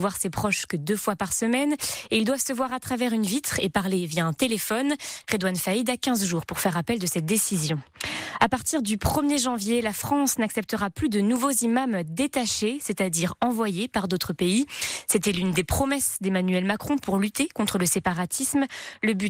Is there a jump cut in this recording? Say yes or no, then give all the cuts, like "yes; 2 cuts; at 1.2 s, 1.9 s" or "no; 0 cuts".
yes; 1 cut; at 5.2 s